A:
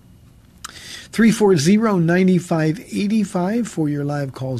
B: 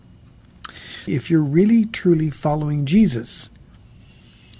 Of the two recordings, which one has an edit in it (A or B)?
B